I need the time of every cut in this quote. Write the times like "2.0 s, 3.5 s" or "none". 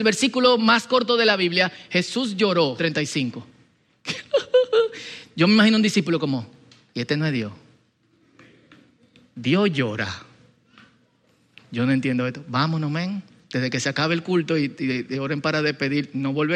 2.8 s

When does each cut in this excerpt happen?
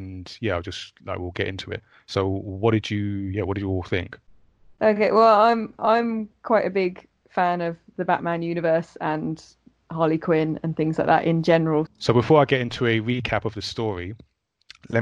11.9 s

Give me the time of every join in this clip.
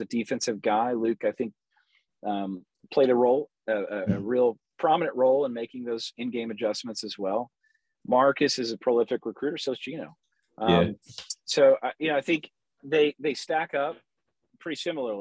none

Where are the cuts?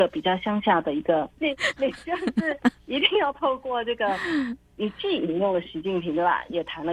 1.4 s

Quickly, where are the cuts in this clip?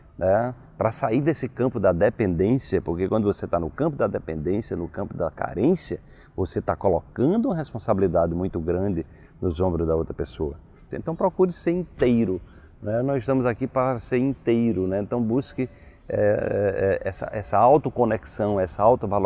10.9 s

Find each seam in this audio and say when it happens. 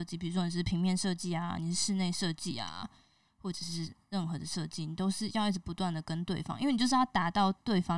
none

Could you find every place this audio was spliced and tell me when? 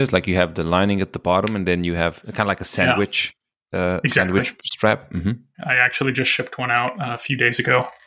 5.5 s

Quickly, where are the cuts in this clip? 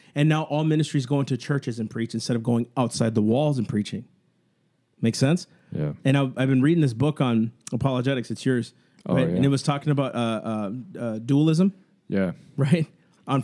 none

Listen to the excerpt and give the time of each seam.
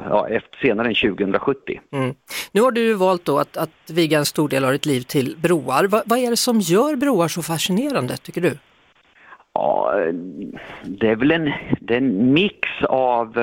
none

